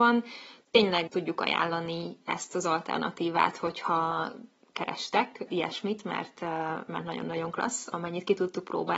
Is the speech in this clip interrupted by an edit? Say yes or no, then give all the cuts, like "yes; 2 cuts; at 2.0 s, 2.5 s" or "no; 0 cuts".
yes; 2 cuts; at 1.1 s, 5.5 s